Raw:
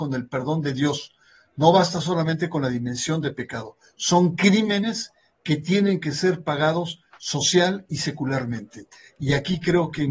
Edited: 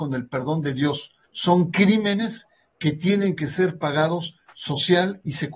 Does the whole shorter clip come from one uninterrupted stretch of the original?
no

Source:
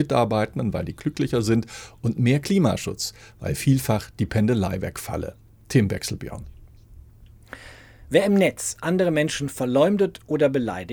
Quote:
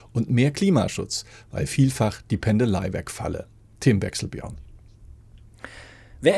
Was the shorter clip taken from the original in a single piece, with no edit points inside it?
yes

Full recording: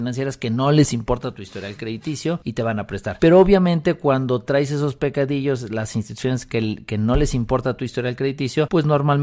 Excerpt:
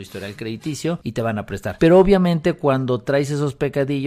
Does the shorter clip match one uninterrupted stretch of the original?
yes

